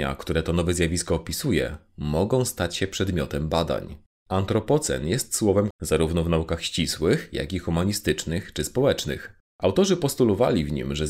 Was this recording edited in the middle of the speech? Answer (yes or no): yes